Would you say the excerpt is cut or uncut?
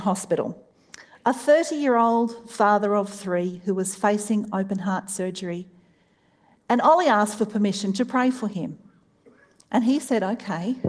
uncut